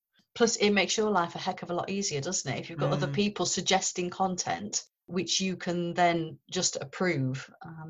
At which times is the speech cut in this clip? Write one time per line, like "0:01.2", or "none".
none